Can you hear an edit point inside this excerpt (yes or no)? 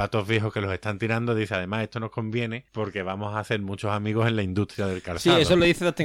yes